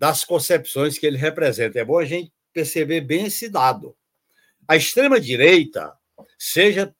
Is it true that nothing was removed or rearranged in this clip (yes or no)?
yes